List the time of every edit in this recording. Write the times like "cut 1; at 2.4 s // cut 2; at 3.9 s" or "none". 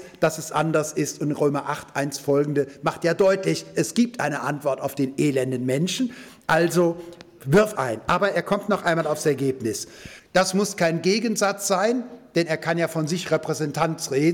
cut 1; at 7.8 s // cut 2; at 10.2 s